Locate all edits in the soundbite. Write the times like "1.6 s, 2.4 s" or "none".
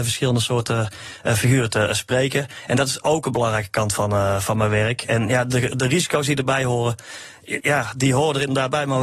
7.6 s